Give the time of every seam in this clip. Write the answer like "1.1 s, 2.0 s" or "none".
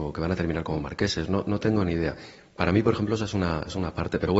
none